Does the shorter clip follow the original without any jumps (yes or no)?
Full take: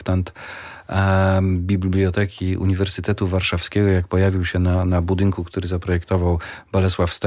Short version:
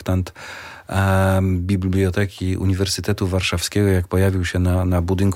yes